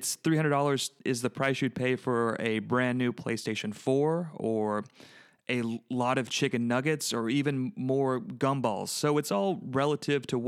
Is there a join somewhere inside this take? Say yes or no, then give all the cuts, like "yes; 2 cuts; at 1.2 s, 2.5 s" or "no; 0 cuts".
yes; 1 cut; at 1.0 s